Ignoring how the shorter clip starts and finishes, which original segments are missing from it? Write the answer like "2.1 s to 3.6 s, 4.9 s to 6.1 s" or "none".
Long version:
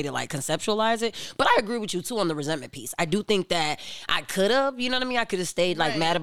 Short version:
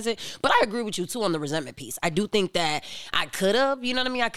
none